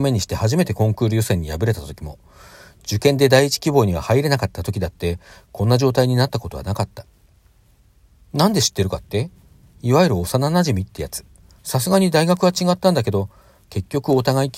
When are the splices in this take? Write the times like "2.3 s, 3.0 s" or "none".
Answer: 11.6 s